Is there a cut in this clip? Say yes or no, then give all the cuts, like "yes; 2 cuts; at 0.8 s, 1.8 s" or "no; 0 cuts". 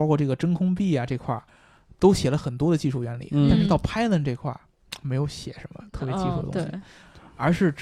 no; 0 cuts